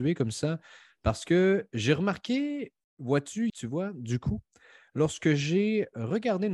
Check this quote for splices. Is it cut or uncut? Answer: cut